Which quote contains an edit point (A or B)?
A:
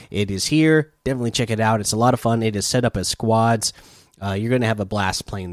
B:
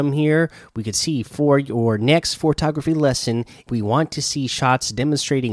B